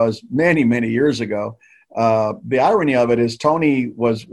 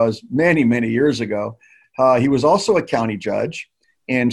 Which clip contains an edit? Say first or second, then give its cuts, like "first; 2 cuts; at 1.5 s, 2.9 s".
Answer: second; 1 cut; at 1.8 s